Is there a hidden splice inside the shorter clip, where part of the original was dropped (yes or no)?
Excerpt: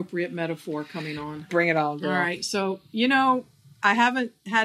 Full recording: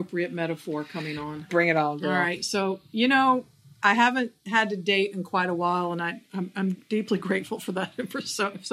no